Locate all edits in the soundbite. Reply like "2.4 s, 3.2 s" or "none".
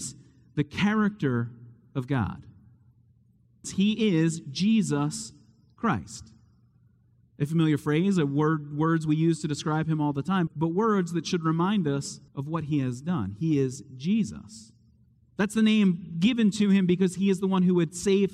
3.6 s, 10.5 s, 12.3 s